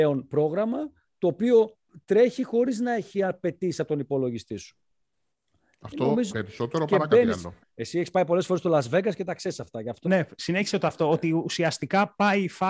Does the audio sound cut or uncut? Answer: cut